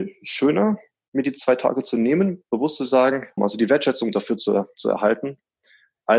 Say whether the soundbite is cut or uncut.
cut